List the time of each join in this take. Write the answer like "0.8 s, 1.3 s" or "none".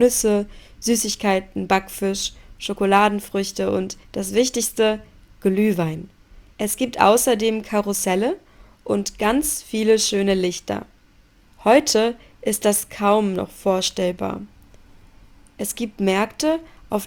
6.5 s, 11.4 s